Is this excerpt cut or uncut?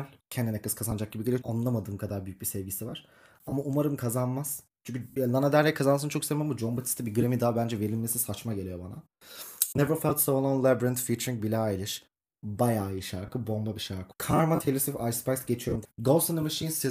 cut